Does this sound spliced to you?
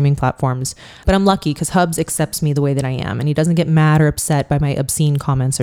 yes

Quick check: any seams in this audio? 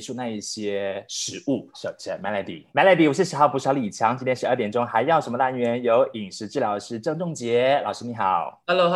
yes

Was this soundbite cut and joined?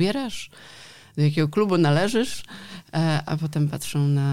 yes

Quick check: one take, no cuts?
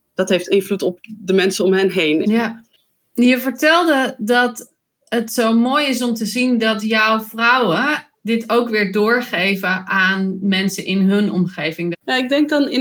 no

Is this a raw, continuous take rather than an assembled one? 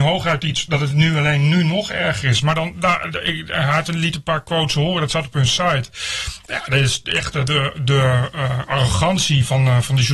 no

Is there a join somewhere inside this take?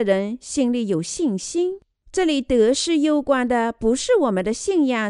yes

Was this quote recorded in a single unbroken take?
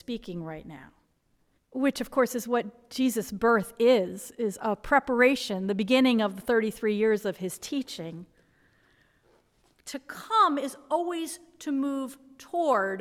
no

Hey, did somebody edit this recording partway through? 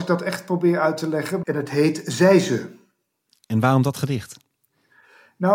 yes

